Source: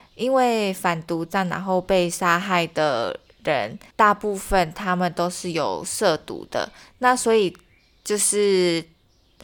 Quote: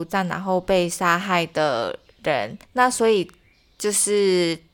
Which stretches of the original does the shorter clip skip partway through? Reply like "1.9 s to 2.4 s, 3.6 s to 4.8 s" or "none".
3.8 s to 6.9 s